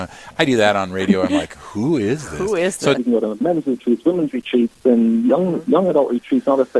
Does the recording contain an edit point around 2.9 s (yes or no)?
yes